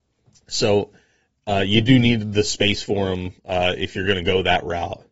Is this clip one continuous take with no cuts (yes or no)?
no